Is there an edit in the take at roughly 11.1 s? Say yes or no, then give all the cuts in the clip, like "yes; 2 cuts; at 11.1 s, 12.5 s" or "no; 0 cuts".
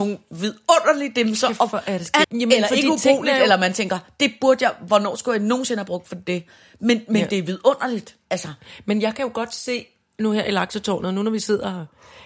no; 1 cut; at 2.2 s